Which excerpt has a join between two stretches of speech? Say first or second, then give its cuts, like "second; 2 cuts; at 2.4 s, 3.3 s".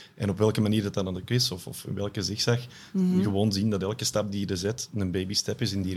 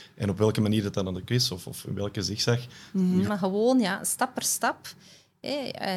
second; 1 cut; at 3.2 s